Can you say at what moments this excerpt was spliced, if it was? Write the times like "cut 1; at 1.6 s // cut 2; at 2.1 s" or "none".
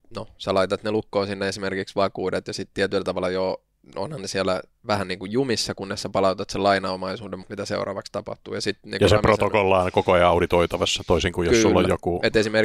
cut 1; at 7.4 s